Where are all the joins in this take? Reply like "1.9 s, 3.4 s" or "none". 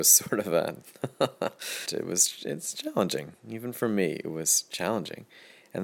1.9 s